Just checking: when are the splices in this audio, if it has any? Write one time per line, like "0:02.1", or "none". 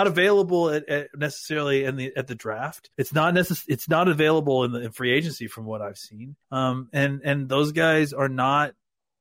0:02.9
0:06.4